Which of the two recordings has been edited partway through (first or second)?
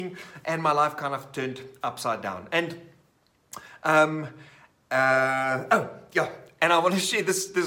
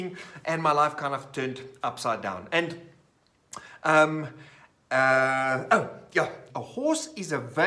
second